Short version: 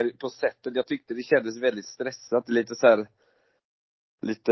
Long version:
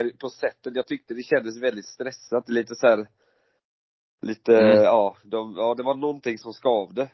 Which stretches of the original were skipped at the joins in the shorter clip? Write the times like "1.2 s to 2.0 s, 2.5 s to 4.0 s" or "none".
none